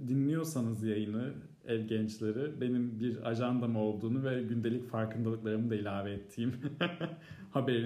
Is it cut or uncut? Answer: uncut